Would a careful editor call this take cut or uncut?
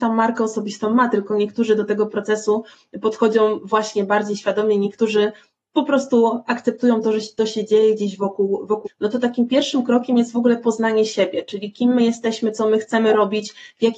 cut